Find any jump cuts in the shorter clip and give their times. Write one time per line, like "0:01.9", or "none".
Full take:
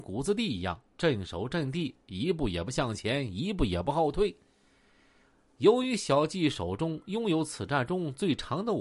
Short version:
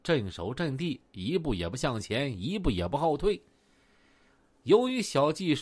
none